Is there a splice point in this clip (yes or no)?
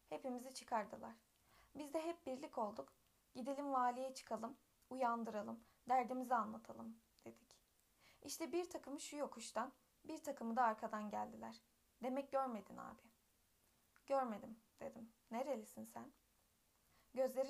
no